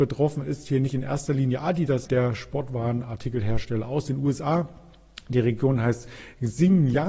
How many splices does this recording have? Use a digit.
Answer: 1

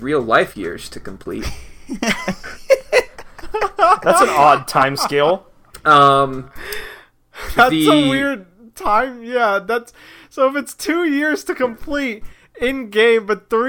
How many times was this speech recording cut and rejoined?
0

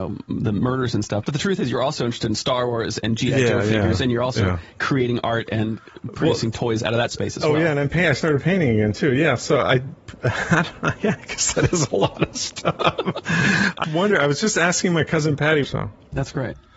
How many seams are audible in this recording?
2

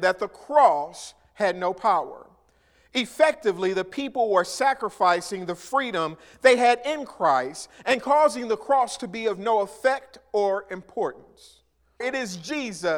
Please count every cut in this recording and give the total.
1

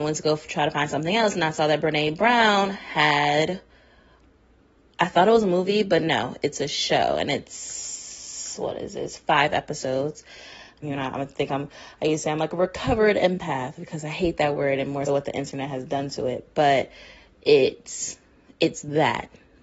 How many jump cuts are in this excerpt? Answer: 2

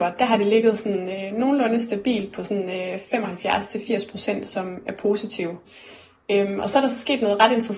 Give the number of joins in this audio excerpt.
0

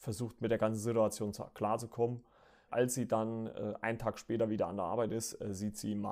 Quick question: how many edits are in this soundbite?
1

